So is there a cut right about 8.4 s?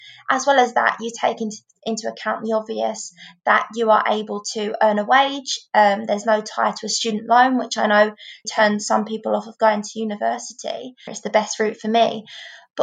yes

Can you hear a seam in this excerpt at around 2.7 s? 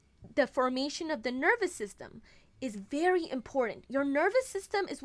no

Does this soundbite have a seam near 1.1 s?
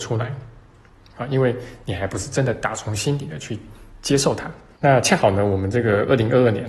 no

